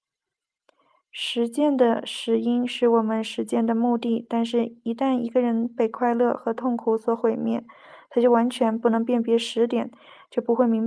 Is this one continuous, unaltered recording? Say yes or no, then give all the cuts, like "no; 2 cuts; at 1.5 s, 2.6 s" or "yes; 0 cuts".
yes; 0 cuts